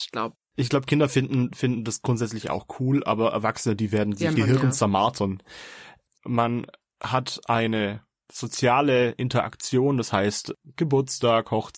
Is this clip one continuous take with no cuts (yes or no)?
no